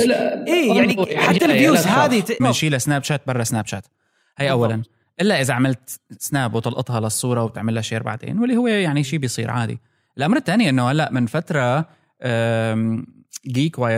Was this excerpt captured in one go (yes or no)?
no